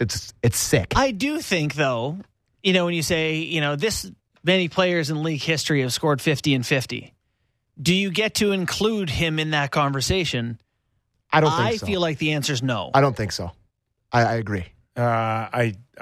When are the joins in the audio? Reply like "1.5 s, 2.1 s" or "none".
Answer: none